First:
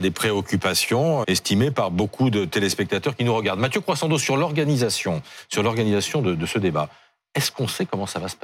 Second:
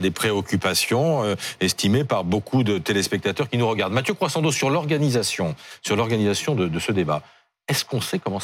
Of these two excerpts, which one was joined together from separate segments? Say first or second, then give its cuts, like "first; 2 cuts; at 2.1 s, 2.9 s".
first; 1 cut; at 1.2 s